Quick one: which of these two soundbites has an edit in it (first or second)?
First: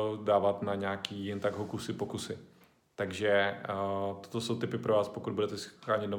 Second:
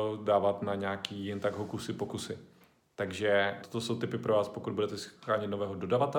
second